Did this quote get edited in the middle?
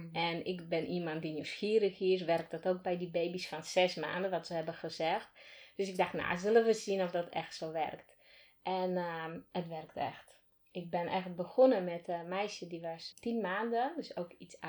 yes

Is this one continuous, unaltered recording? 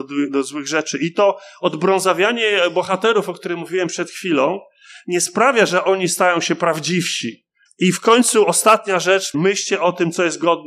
no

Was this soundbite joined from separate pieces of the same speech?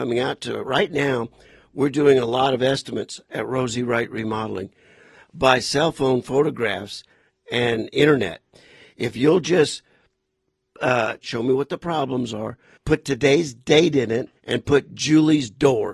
yes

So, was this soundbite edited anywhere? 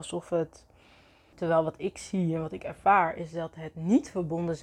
yes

